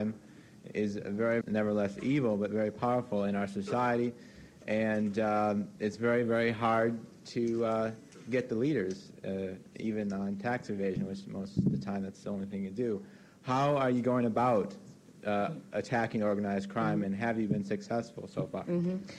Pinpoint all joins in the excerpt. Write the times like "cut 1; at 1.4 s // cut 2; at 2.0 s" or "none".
cut 1; at 1.4 s